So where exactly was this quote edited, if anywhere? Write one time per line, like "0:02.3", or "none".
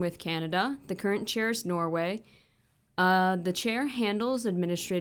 none